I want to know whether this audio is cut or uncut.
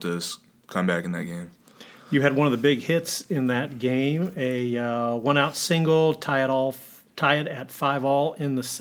uncut